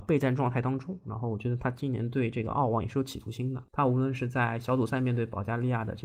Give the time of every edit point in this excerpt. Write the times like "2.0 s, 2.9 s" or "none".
3.7 s